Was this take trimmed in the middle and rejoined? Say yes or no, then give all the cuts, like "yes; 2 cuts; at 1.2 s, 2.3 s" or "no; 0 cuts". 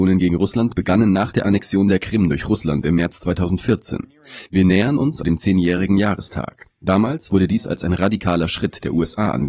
yes; 1 cut; at 5.2 s